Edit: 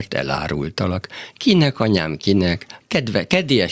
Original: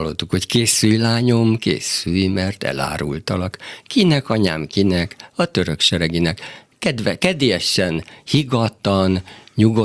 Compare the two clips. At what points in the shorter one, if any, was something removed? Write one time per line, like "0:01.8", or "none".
0:02.8